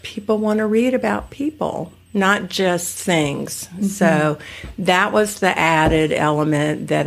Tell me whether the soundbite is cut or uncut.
uncut